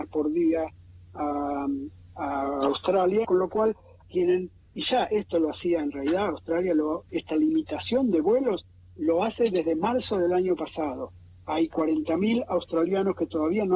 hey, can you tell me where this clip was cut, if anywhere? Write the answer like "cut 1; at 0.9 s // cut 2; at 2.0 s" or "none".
cut 1; at 3.2 s // cut 2; at 7.1 s